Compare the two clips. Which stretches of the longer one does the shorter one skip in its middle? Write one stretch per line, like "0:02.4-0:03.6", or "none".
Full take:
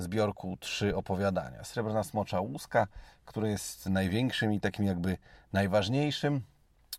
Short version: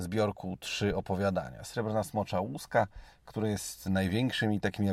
none